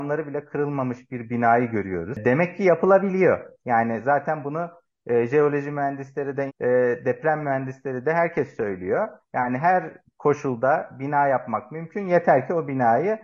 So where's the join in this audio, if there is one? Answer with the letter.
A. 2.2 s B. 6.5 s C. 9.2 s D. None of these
B